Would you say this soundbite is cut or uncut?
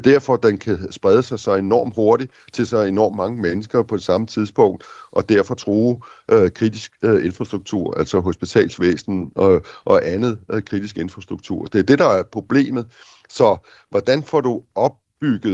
uncut